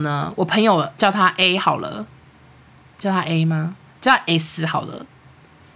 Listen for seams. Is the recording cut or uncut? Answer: uncut